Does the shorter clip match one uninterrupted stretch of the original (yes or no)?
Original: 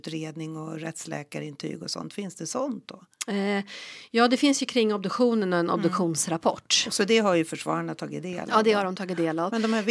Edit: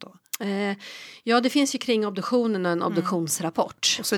yes